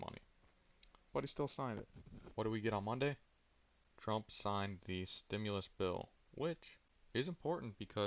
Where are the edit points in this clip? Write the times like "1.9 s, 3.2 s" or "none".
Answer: 1.1 s, 2.3 s